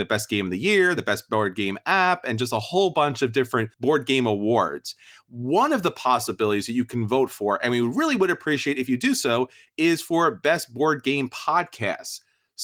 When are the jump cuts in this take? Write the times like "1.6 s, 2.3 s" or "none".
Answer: none